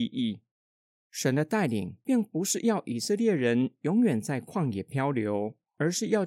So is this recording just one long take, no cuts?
yes; 0 cuts

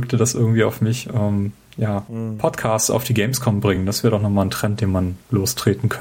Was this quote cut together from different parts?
no; 0 cuts

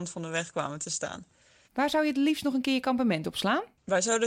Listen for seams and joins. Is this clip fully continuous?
no; 1 cut; at 1.7 s

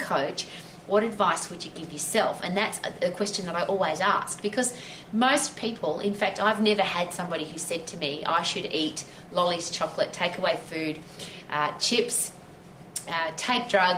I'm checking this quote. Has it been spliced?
no; 0 cuts

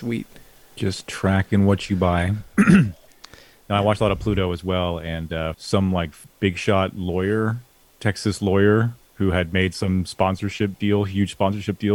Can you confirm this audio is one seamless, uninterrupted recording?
no; 1 cut; at 5.5 s

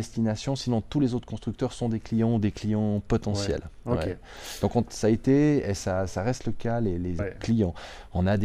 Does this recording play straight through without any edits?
no; 1 cut; at 7.2 s

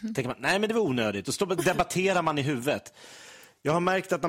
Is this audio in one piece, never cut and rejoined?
yes; 0 cuts

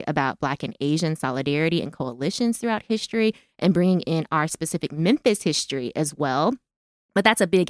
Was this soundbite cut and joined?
no; 0 cuts

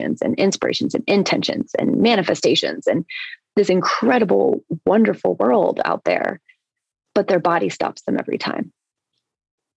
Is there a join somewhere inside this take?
no; 0 cuts

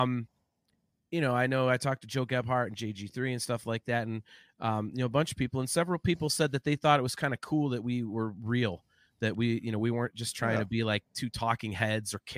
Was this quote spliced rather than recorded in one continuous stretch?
no; 0 cuts

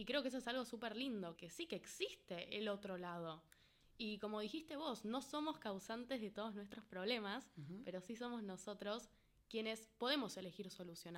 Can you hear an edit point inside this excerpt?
yes; 1 cut; at 1.4 s

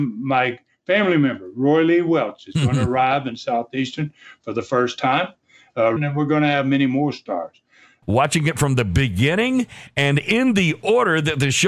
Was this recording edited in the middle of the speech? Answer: yes; 2 cuts; at 6.0 s, 8.0 s

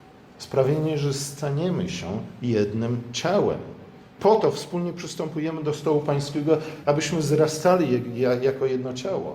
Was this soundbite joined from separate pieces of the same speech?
yes; 2 cuts; at 4.2 s, 6.8 s

